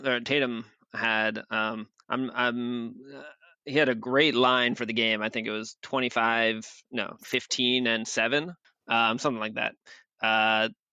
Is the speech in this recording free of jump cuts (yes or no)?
no